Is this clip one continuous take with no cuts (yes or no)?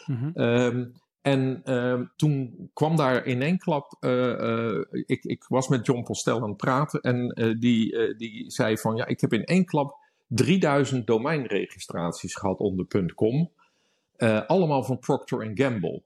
no